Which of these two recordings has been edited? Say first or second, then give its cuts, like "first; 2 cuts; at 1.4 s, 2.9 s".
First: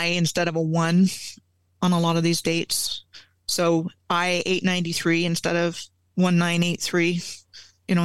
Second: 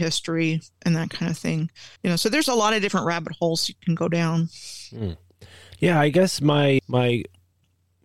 second; 1 cut; at 2.0 s